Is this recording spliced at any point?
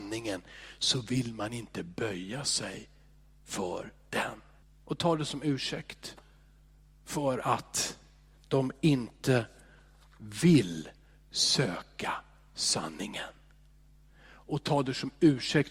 yes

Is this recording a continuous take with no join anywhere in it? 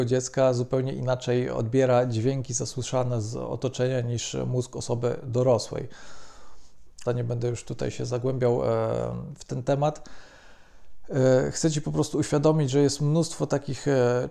no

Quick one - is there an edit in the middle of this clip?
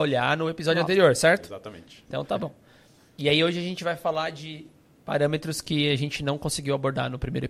no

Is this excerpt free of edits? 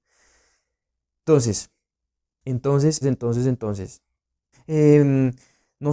no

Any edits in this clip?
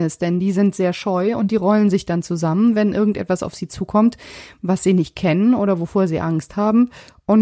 no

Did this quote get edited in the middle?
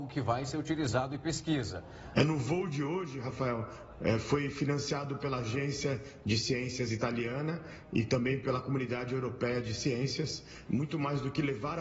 yes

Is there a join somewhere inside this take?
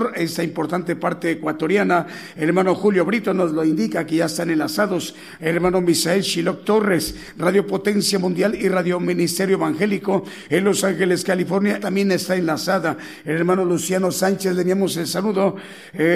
yes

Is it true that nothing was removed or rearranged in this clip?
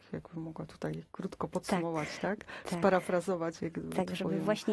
yes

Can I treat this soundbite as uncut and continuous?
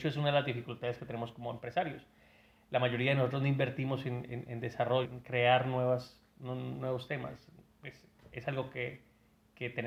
no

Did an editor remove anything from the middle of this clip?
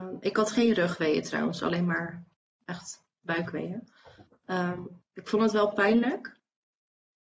no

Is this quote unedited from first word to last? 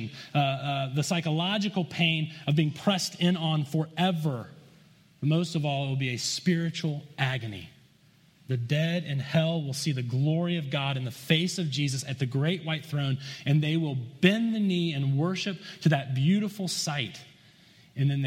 yes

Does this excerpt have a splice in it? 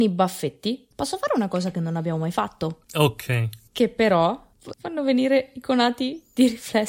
yes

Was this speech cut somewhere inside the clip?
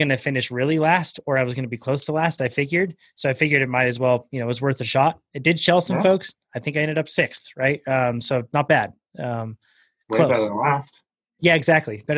no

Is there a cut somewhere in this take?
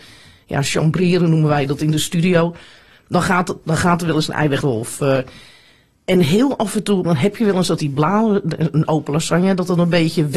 yes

